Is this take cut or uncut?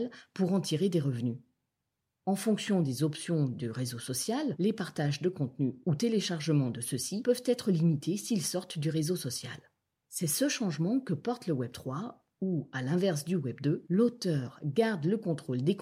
uncut